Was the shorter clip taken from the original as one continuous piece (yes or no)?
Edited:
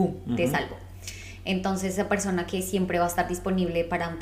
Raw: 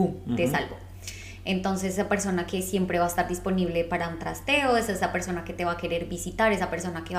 yes